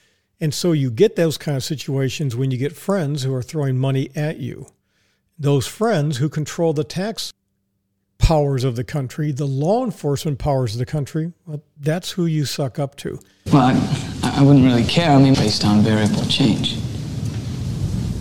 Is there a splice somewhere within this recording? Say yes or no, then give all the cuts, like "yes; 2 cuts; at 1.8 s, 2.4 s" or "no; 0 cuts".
yes; 2 cuts; at 13.5 s, 15.3 s